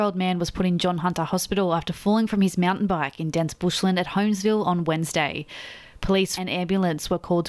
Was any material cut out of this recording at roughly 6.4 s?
yes; 1 cut; at 6.4 s

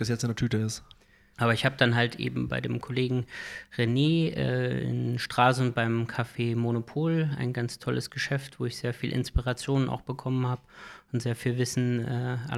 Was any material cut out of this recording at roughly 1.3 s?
yes; 1 cut; at 1.3 s

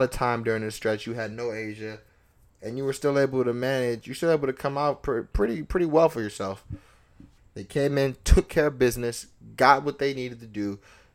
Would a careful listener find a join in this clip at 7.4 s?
yes; 1 cut; at 7.4 s

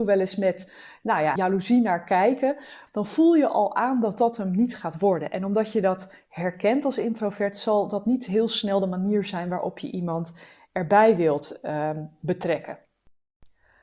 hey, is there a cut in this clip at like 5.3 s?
no; 2 cuts; at 1.4 s, 2.9 s

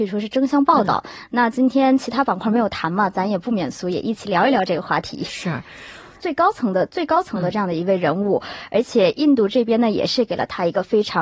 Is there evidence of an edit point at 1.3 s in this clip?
no; 1 cut; at 6.2 s

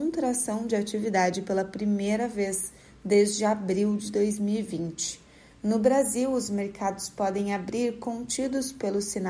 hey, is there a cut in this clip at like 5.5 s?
yes; 1 cut; at 5.5 s

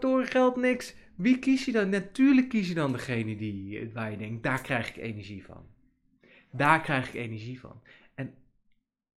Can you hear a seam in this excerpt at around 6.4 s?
no; 0 cuts

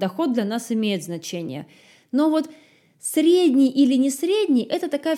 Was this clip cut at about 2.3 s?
no; 0 cuts

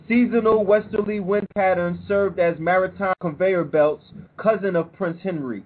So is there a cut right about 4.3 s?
yes; 1 cut; at 4.3 s

